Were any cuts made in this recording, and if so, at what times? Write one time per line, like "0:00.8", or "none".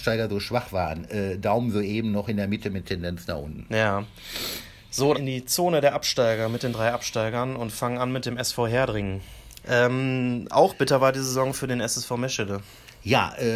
0:05.1
0:09.6

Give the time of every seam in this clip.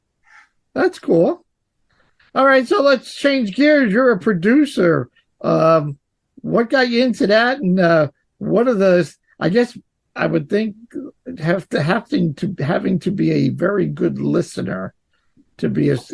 none

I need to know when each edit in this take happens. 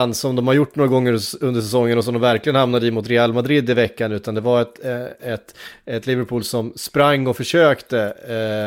none

